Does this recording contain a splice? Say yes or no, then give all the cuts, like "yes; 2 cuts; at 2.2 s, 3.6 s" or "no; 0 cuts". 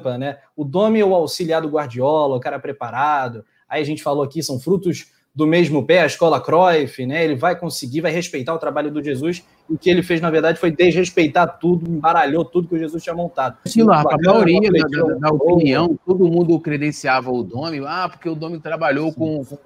yes; 1 cut; at 13.7 s